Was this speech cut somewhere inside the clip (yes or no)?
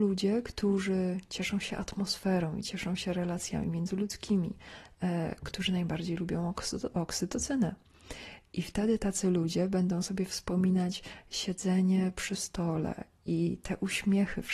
no